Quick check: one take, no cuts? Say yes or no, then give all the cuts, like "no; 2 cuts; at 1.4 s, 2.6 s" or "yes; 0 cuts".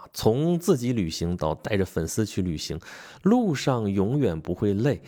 yes; 0 cuts